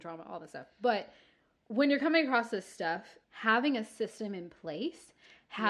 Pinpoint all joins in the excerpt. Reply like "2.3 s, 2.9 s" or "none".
3.2 s